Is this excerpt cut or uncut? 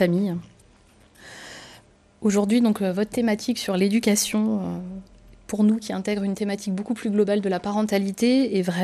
uncut